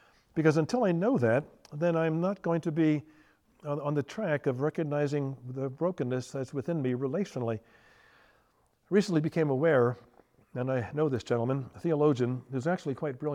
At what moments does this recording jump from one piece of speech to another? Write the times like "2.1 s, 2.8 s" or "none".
none